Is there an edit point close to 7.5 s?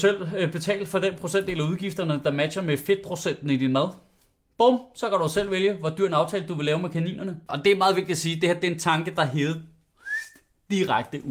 yes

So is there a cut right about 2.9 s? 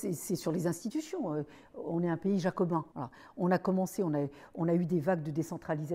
yes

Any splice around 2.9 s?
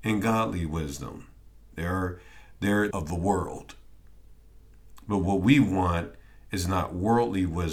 yes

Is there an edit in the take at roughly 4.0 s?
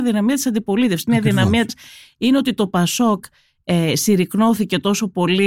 no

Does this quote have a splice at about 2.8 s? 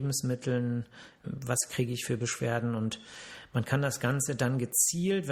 no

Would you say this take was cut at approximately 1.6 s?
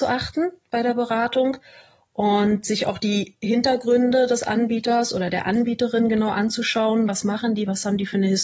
no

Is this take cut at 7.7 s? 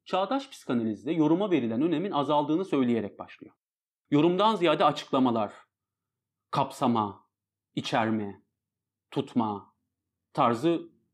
no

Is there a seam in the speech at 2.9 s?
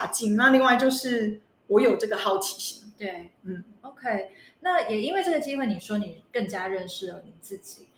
no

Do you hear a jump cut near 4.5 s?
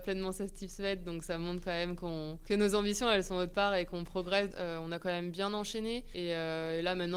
yes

